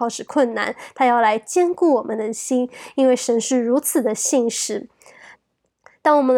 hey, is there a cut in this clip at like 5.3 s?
yes; 1 cut; at 5.3 s

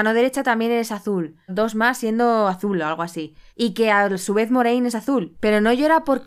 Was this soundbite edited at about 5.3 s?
yes; 3 cuts; at 1.5 s, 3.5 s, 5.3 s

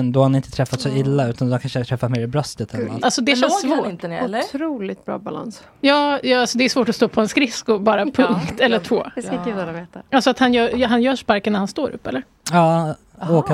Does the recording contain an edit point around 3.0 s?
yes; 1 cut; at 3.0 s

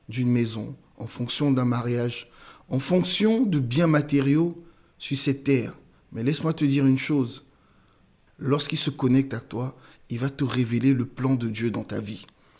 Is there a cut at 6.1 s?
no; 1 cut; at 8.3 s

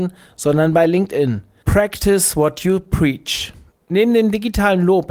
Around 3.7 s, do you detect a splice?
no; 1 cut; at 1.6 s

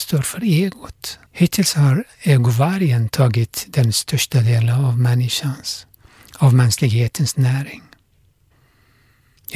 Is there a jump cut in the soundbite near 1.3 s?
yes; 1 cut; at 1.3 s

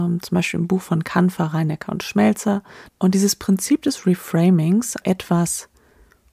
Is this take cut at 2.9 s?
yes; 2 cuts; at 2.9 s, 5.0 s

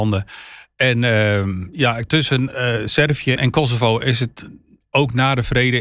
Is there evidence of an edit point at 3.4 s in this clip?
yes; 2 cuts; at 2.1 s, 3.4 s

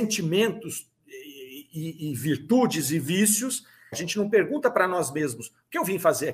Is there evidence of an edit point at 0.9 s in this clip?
no; 1 cut; at 3.9 s

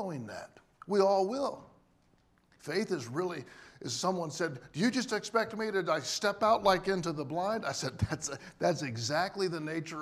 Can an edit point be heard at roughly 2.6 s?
yes; 1 cut; at 2.6 s

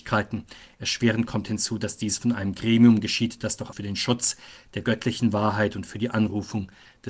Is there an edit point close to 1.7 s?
no; 1 cut; at 3.7 s

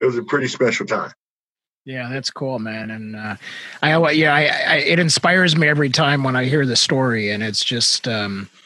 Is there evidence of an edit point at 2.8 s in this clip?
no; 0 cuts

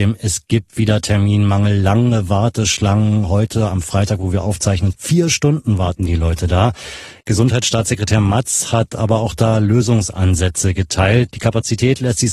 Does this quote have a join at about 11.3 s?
yes; 2 cuts; at 4.9 s, 11.3 s

